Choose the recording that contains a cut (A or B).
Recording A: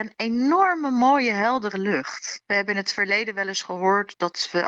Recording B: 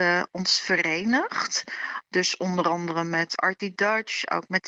A